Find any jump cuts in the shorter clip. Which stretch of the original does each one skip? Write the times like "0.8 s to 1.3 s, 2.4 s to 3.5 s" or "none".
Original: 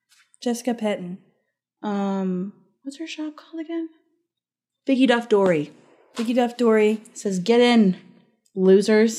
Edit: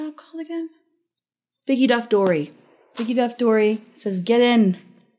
none